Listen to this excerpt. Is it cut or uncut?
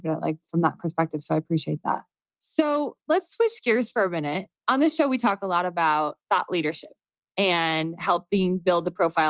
cut